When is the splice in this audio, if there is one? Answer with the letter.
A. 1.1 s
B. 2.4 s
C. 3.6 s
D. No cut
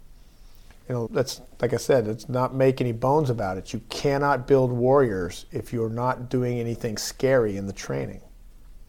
A